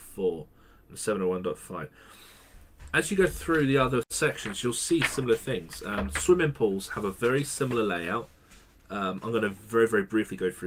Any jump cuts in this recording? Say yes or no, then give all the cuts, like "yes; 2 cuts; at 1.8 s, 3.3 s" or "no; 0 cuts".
no; 0 cuts